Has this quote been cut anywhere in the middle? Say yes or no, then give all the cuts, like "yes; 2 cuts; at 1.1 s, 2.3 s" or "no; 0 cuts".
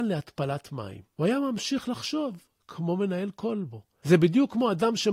no; 0 cuts